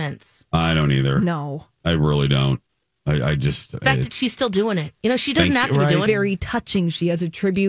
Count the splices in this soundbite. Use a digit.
1